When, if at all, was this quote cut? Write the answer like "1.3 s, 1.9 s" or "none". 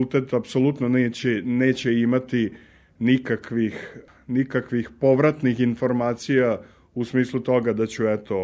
none